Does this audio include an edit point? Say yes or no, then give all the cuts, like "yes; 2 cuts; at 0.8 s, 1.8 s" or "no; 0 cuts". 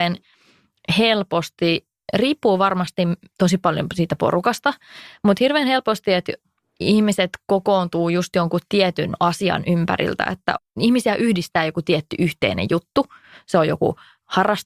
no; 0 cuts